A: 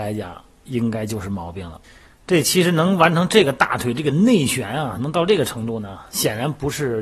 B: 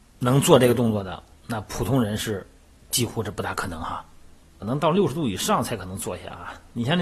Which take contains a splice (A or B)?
B